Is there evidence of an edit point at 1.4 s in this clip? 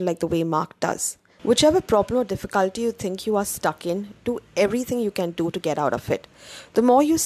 yes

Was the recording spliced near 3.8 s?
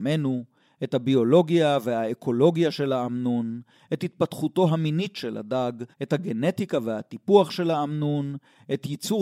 no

